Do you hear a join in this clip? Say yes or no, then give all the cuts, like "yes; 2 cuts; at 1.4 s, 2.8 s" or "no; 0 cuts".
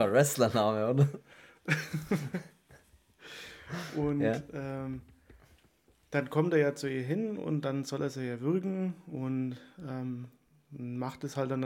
no; 0 cuts